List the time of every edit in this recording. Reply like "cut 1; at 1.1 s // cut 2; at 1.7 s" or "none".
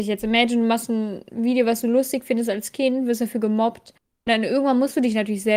none

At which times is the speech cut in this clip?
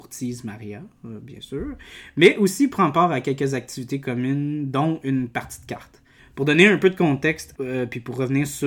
cut 1; at 6.2 s // cut 2; at 7.5 s

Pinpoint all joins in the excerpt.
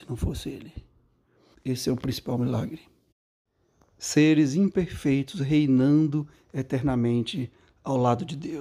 cut 1; at 1.5 s

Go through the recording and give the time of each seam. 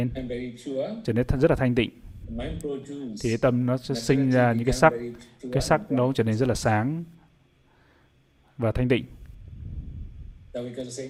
none

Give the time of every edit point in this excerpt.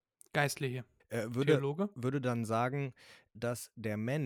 cut 1; at 1.0 s // cut 2; at 3.3 s

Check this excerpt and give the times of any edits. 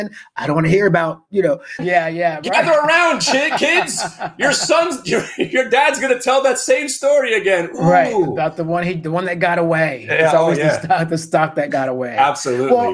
cut 1; at 1.8 s

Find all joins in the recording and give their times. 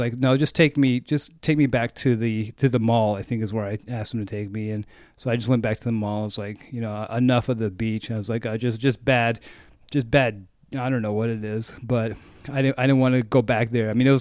none

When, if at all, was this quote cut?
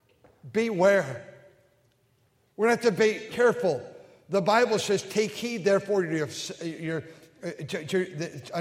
cut 1; at 3.3 s

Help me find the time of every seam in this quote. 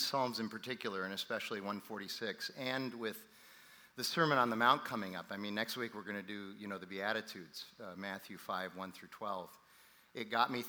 none

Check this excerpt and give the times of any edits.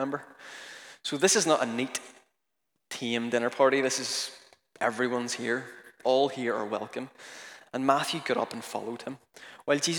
cut 1; at 6.0 s // cut 2; at 7.6 s

